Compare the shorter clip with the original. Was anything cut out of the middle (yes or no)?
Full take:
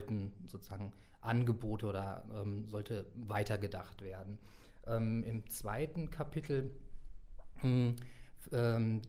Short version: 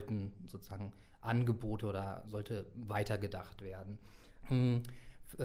yes